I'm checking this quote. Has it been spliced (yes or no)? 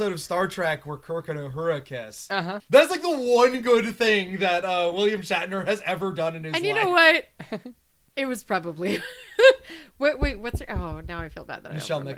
yes